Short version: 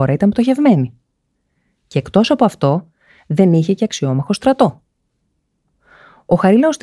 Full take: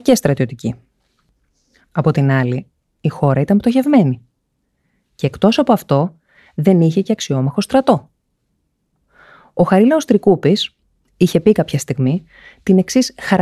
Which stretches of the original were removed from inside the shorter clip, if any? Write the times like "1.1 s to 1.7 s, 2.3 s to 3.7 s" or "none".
none